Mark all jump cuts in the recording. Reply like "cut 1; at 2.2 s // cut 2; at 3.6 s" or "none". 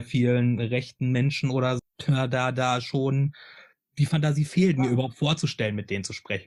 cut 1; at 1.8 s